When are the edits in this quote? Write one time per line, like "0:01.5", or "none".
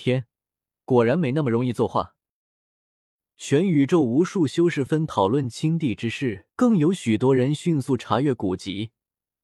0:04.9
0:06.5